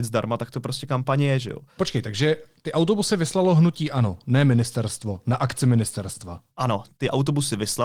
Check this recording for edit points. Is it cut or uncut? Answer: cut